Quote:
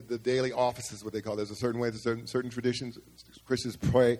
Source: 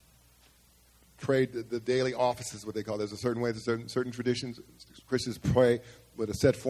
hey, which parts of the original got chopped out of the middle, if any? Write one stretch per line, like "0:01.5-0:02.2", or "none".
none

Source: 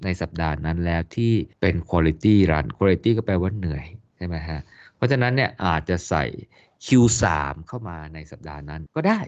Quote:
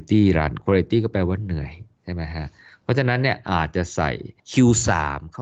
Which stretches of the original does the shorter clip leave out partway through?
0:06.5-0:06.7

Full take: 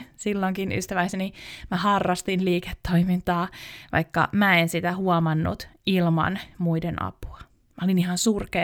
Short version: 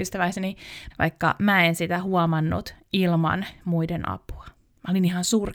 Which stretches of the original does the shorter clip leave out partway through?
0:01.7-0:03.8

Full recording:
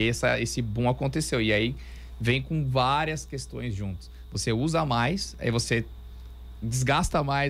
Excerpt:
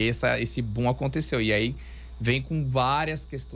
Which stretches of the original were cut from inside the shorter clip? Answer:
none

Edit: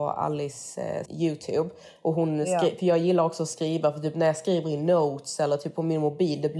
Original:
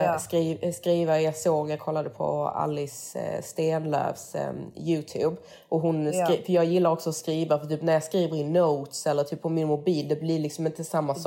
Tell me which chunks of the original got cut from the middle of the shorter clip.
0:03.4-0:04.7

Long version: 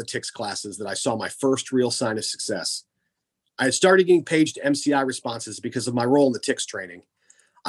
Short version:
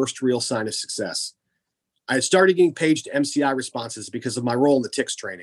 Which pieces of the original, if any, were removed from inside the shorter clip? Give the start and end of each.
none

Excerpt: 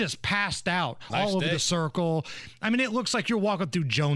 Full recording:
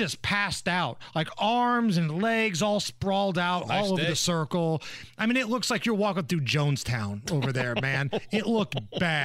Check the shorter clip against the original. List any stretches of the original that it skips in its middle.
0:01.1-0:03.7

